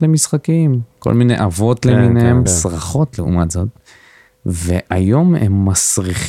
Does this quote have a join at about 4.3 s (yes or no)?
yes